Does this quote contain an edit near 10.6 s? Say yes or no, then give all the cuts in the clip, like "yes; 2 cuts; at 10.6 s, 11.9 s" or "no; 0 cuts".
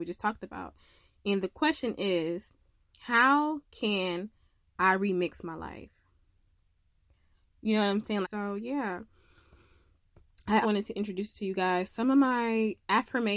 yes; 2 cuts; at 8.2 s, 10.6 s